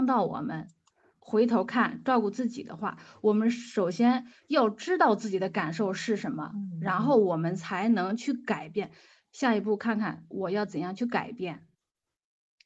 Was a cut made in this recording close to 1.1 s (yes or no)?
yes